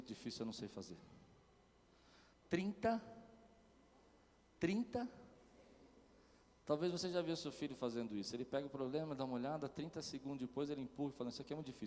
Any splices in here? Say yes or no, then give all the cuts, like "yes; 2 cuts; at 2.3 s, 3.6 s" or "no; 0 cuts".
no; 0 cuts